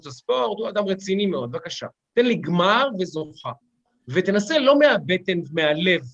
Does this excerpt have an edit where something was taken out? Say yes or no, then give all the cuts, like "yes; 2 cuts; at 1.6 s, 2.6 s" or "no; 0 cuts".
no; 0 cuts